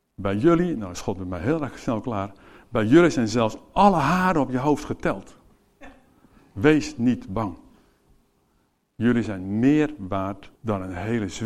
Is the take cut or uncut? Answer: cut